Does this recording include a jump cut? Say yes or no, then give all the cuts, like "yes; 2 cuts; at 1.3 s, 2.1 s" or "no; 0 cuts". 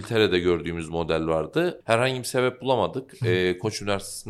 yes; 1 cut; at 1.8 s